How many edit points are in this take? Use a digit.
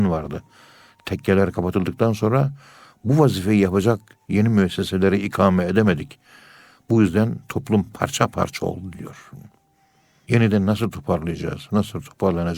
0